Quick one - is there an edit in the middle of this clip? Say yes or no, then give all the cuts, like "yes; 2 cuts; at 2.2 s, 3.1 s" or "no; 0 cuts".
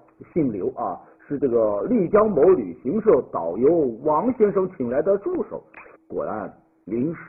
yes; 1 cut; at 5.9 s